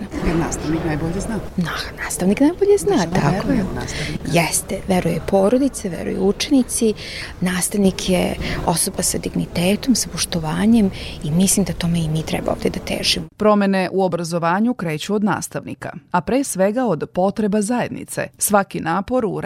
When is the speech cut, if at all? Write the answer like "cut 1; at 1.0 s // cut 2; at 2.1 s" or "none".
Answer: none